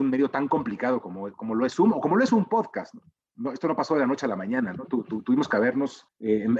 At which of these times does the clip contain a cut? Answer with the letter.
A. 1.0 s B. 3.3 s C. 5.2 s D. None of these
D